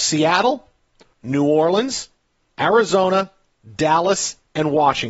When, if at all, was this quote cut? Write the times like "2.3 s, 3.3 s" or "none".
1.1 s